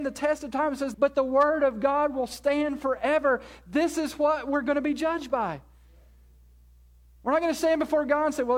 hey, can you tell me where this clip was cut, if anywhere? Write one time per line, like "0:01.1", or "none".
0:00.9

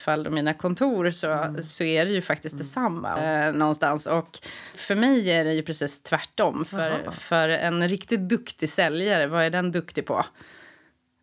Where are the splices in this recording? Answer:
0:03.2
0:04.7

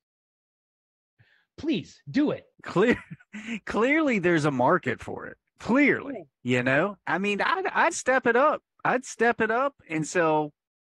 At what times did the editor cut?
0:02.5
0:06.3
0:07.9

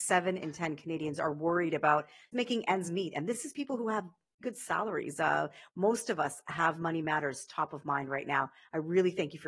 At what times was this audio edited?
0:02.3
0:04.4

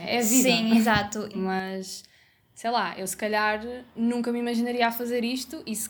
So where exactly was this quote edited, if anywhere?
0:01.3

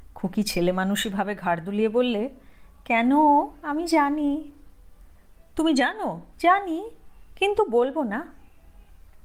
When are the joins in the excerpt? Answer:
0:06.3

